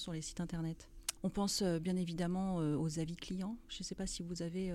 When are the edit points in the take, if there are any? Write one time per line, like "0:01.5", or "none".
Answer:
0:01.2